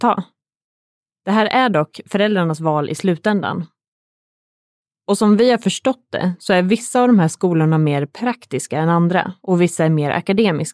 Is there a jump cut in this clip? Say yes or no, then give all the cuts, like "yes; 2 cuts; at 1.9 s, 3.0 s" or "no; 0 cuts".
no; 0 cuts